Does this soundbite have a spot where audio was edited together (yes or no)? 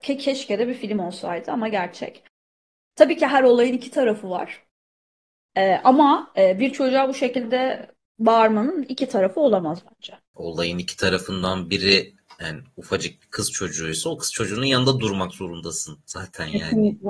yes